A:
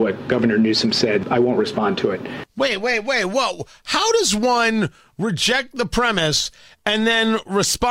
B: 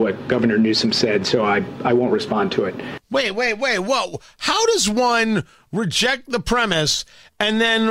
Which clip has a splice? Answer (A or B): A